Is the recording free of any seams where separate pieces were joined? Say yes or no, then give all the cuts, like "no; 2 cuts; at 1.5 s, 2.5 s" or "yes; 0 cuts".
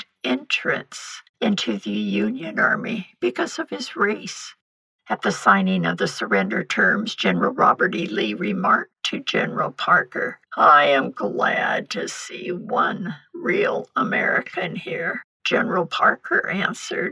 no; 1 cut; at 10.5 s